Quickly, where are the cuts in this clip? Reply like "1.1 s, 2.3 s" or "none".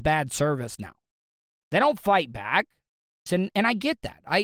3.3 s